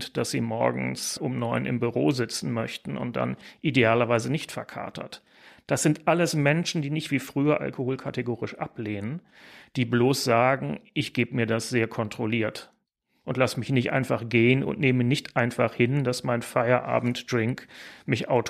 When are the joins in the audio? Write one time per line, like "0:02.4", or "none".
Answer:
none

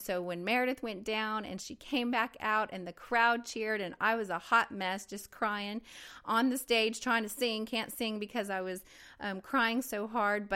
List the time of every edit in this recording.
none

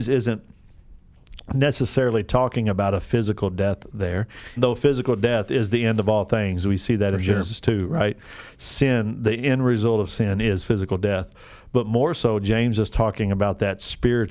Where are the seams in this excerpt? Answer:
0:04.6

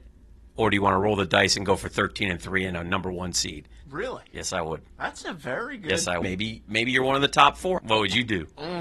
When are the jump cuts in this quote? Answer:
0:03.8
0:06.2
0:07.8

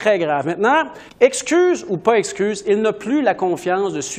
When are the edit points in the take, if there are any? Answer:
0:01.1

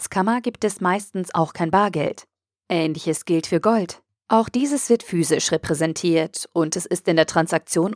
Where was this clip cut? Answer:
0:02.6

